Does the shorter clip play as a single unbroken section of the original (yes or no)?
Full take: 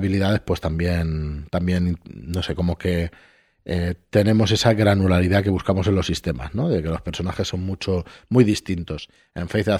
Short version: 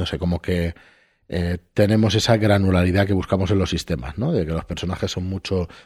yes